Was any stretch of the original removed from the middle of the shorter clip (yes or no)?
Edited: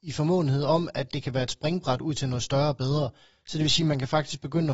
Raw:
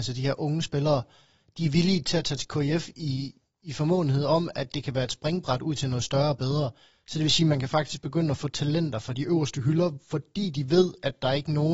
no